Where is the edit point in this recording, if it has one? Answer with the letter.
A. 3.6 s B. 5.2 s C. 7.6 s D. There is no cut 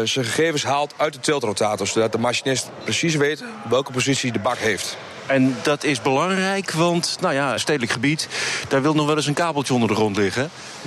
C